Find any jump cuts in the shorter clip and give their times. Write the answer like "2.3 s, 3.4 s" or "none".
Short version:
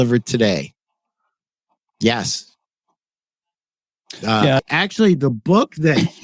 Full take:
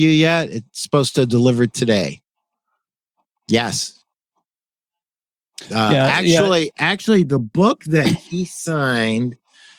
4.6 s